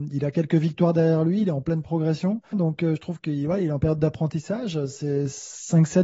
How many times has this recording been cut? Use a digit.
1